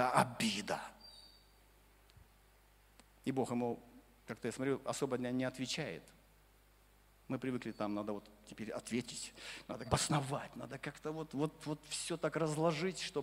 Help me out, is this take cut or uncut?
cut